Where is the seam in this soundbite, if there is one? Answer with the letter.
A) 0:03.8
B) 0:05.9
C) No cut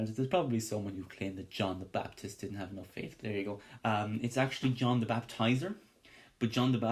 A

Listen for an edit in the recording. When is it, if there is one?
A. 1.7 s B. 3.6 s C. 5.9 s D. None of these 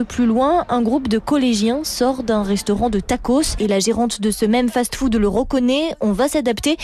B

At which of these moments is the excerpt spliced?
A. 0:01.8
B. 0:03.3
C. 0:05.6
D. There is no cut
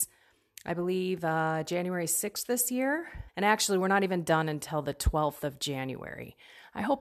B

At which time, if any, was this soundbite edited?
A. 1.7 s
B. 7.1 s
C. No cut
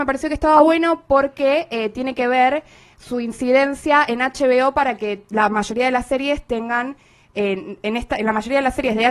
C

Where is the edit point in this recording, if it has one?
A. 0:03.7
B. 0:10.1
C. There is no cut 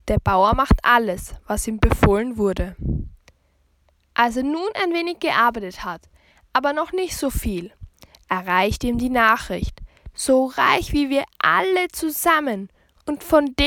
B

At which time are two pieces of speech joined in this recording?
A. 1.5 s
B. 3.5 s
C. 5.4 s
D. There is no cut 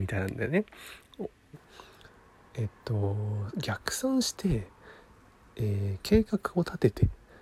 A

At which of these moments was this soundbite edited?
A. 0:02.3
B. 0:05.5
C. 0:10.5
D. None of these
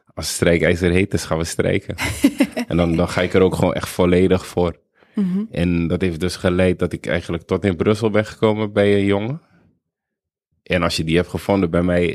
C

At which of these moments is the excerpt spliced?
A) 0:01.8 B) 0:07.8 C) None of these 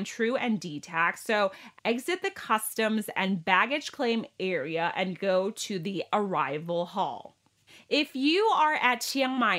A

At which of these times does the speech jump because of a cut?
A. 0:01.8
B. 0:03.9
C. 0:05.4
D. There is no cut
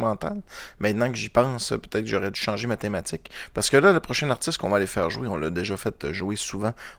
D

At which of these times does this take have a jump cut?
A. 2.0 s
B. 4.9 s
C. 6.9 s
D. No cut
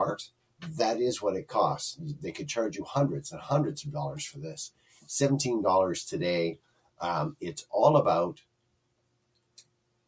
D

